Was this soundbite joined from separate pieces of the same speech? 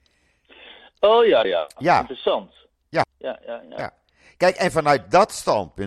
yes; 2 cuts; at 1.4 s, 3.0 s

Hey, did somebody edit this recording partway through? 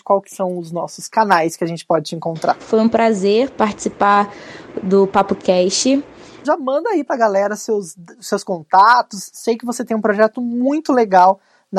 yes; 2 cuts; at 2.6 s, 6.4 s

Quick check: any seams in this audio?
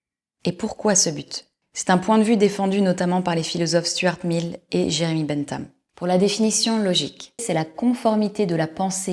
yes; 2 cuts; at 5.9 s, 7.4 s

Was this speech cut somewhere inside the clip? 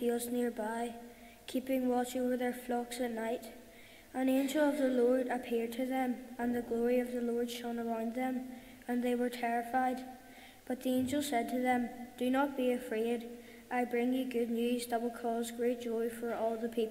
no; 0 cuts

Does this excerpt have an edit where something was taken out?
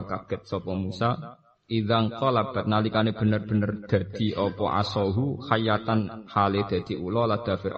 no; 0 cuts

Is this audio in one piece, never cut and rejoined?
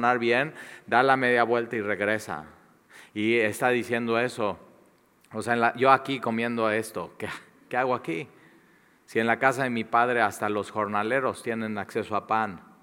yes; 0 cuts

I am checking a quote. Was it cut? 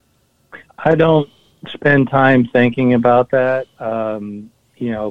no; 0 cuts

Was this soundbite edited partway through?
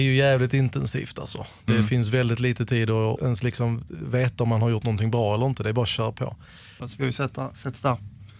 yes; 2 cuts; at 3.2 s, 6.8 s

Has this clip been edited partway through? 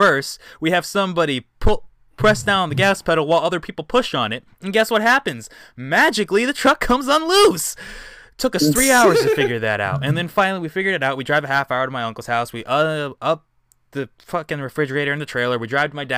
no; 0 cuts

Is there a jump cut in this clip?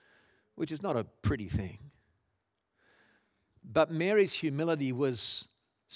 no; 0 cuts

